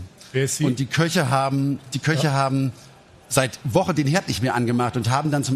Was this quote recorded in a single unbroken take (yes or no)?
no